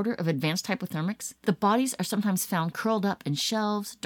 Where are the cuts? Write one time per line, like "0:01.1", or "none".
0:01.4